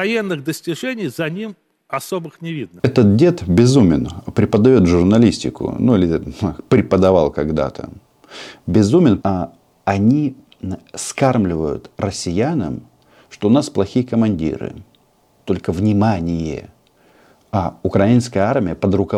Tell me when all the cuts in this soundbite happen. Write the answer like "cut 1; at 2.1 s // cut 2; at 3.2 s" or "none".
cut 1; at 9.2 s